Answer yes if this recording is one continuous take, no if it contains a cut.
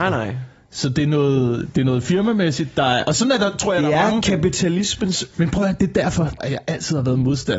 no